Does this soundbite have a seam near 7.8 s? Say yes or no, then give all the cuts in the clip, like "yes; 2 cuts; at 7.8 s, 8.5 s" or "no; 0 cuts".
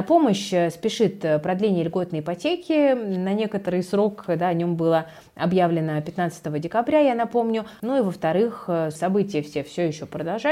yes; 2 cuts; at 7.8 s, 9.0 s